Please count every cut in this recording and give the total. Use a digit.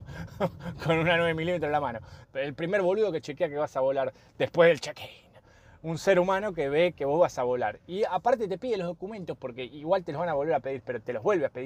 1